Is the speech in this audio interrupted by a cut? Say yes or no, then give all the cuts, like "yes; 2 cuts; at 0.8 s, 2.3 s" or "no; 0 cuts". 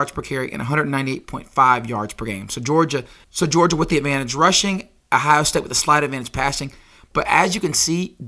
no; 0 cuts